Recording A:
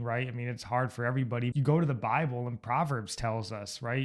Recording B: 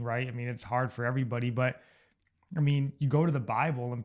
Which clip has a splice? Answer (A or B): A